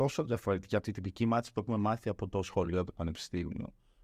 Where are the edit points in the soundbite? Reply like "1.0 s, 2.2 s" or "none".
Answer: none